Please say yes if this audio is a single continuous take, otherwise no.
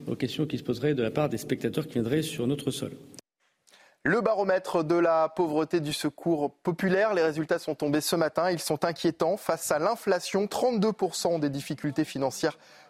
no